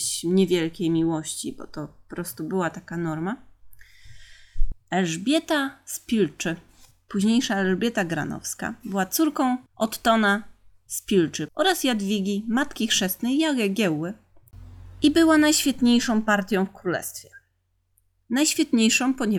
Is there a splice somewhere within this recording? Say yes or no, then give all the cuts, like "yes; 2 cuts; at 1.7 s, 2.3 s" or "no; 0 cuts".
yes; 3 cuts; at 4.7 s, 9.7 s, 11.5 s